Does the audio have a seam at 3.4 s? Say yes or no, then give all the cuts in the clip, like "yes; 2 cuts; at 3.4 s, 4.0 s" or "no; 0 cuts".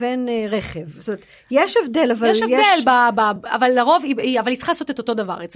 yes; 1 cut; at 3.4 s